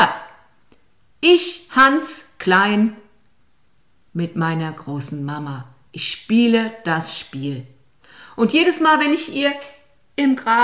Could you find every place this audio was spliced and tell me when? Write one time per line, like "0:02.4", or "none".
none